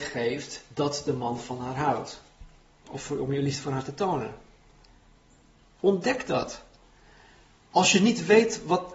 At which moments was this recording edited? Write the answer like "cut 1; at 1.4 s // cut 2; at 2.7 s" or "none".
cut 1; at 2.8 s